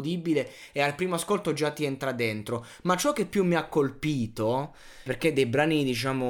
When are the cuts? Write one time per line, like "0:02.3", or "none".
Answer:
0:05.1